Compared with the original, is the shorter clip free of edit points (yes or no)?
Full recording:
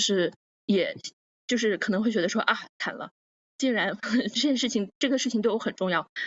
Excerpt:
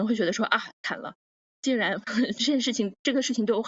yes